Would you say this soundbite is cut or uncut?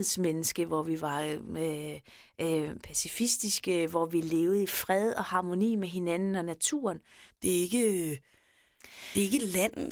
cut